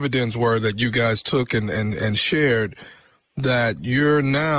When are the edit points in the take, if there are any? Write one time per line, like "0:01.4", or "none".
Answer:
none